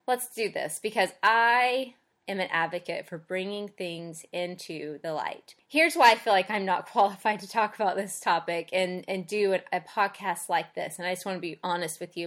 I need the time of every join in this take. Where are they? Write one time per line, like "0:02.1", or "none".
none